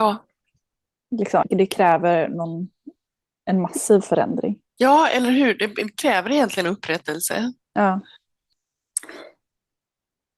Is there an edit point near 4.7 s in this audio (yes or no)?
yes